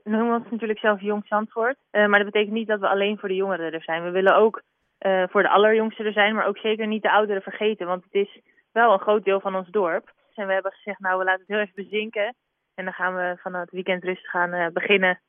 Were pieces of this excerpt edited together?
yes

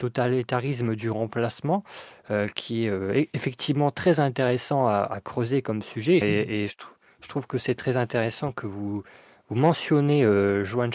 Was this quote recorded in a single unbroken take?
no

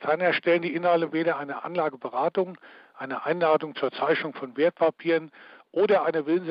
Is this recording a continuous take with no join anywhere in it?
no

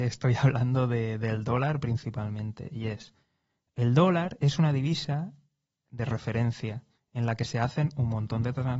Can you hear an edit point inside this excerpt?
no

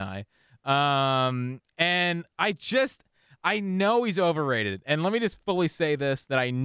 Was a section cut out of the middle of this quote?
no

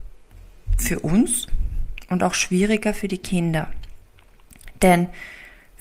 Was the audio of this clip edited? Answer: no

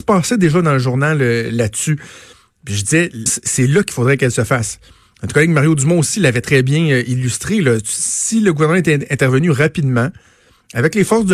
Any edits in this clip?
yes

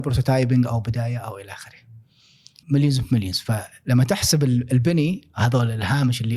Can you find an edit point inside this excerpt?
yes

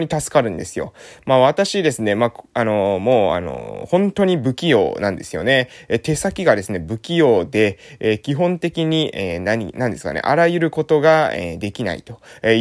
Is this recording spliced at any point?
no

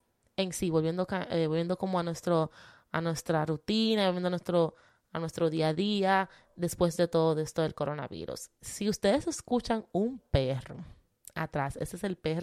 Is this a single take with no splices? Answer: yes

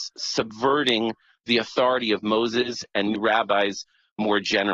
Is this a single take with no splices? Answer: no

